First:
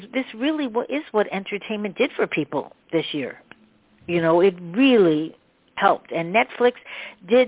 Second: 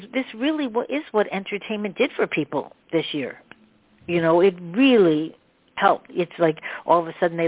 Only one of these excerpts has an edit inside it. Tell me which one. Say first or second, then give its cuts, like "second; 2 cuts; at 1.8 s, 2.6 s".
second; 1 cut; at 6.1 s